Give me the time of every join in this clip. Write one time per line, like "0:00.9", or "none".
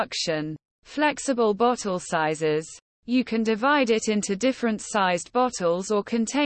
0:02.9

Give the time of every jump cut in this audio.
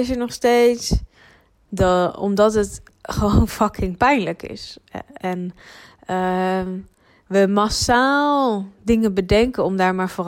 0:01.7

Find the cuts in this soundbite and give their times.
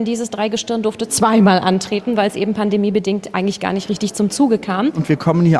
none

